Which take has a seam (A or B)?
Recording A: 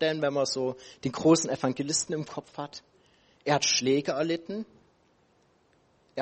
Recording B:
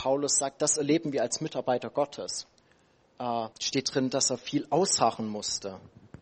B